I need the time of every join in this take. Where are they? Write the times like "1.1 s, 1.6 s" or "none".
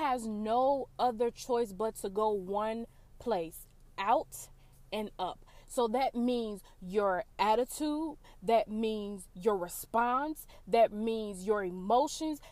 none